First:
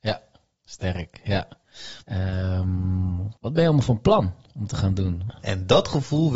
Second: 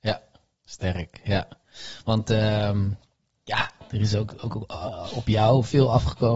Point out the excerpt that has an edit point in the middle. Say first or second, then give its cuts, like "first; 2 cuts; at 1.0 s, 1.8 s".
first; 3 cuts; at 2.0 s, 3.4 s, 5.3 s